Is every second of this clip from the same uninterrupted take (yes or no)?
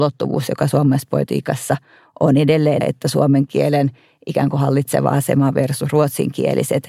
no